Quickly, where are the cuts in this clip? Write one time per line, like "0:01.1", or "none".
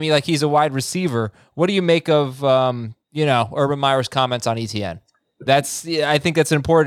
0:03.0
0:05.5